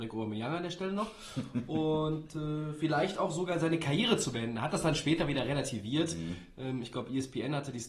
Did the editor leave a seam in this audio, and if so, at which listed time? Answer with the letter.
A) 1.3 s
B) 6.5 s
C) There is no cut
C